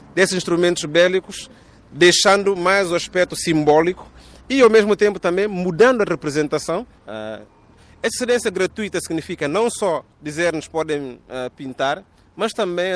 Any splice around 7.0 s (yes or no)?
yes